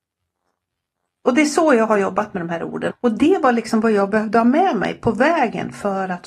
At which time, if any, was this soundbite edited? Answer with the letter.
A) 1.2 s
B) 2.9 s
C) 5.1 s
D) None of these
B